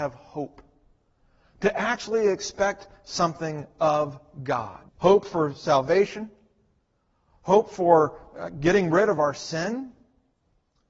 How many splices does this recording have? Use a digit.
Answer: 1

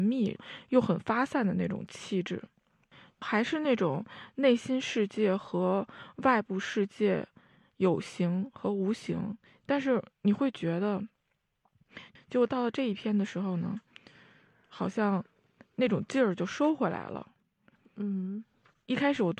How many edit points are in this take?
2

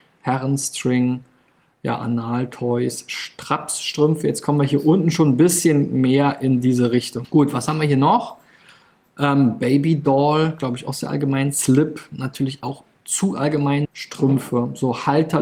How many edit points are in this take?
2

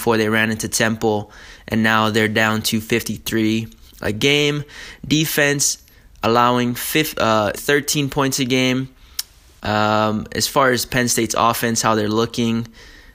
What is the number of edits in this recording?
1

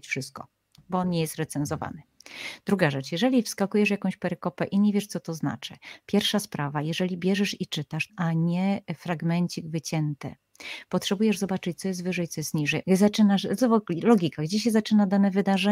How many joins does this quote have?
2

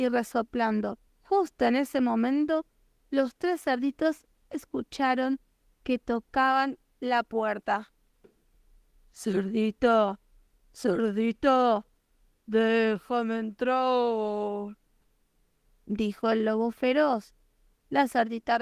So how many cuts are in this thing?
1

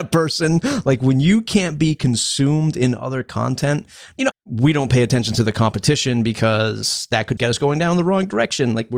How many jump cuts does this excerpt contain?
2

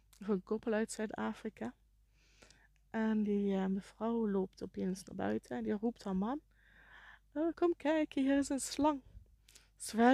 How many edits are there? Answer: 0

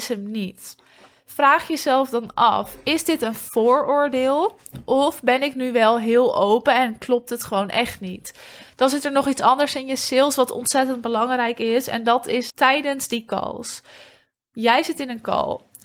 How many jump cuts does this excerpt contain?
2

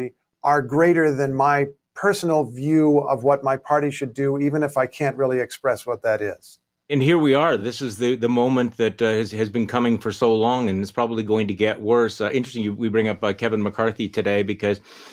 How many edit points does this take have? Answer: 0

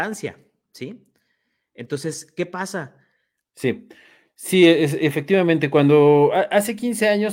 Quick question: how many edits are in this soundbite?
1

